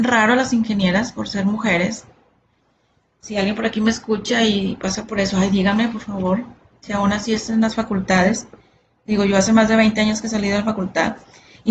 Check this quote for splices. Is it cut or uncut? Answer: uncut